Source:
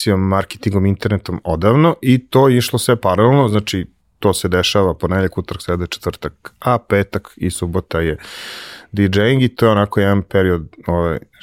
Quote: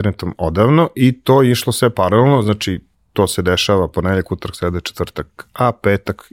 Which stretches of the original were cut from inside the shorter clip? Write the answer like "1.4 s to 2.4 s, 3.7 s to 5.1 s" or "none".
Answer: none